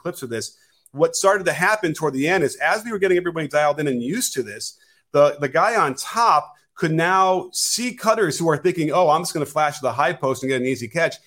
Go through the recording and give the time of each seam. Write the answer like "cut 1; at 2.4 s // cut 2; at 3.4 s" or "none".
none

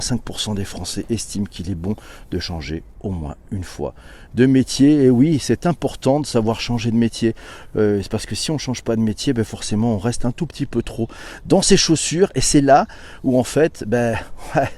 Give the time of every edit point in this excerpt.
none

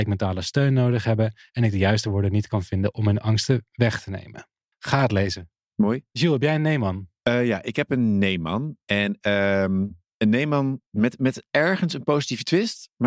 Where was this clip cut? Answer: cut 1; at 4.7 s // cut 2; at 10.9 s

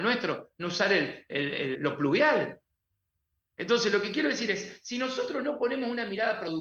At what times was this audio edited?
cut 1; at 1.7 s

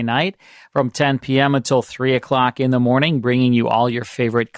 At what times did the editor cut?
none

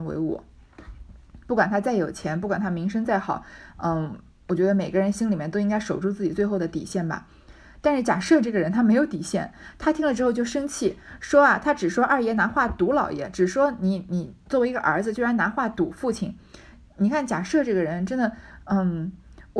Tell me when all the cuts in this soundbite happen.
none

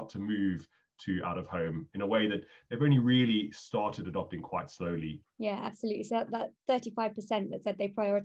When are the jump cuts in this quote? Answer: cut 1; at 5.2 s // cut 2; at 6.3 s

